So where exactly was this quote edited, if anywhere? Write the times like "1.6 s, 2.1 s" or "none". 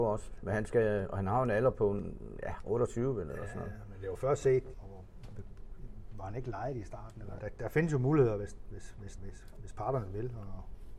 4.7 s, 7.4 s, 9.2 s

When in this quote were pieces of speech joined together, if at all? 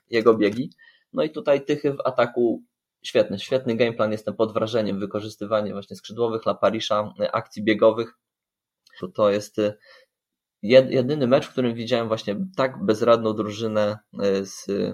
9.0 s

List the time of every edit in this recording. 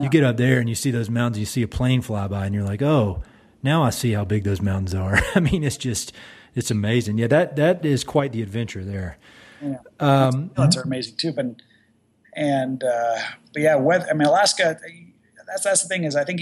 11.3 s

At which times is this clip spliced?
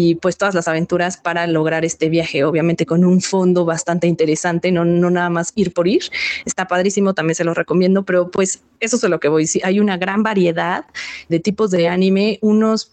11.3 s

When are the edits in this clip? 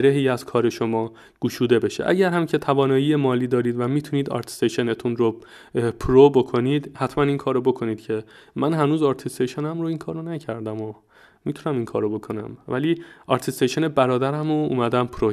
none

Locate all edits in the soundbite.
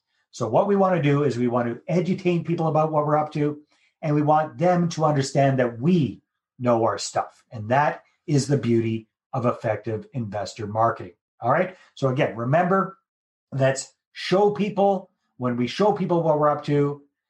none

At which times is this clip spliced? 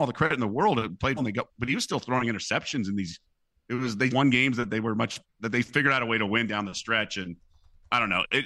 1.2 s, 4.1 s

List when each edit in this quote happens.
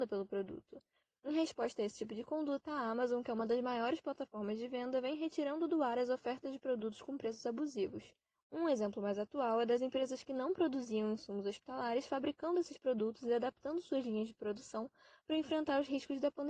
8.3 s

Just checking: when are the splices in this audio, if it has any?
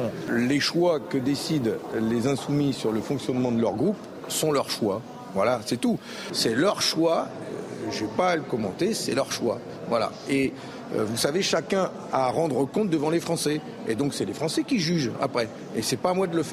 6.3 s

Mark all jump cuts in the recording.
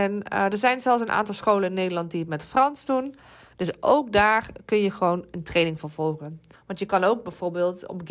6.5 s

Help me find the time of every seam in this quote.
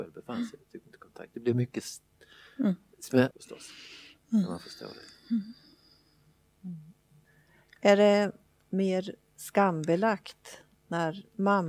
3.3 s

